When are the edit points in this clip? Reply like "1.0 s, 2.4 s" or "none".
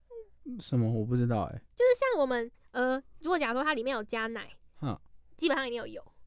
none